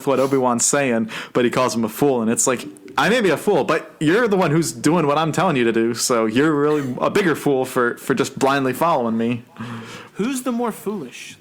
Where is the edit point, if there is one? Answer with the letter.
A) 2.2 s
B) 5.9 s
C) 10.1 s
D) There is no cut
C